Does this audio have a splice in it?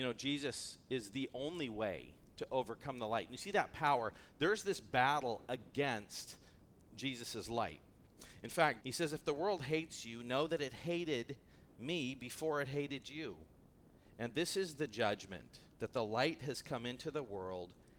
yes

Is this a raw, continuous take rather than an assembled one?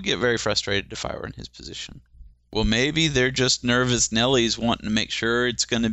yes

